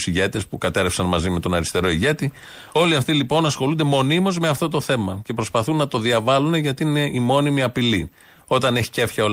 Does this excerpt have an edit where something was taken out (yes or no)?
no